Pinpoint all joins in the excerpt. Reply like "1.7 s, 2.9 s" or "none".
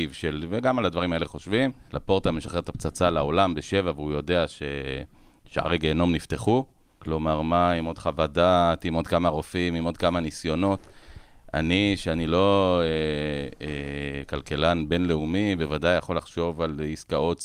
1.9 s, 7.0 s